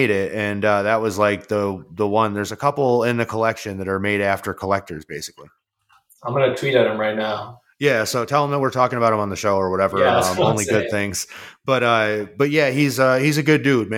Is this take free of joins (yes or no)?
yes